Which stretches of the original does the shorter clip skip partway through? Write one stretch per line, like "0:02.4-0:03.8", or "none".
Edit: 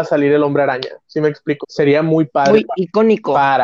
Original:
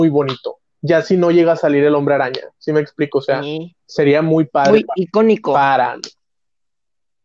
0:03.1-0:03.8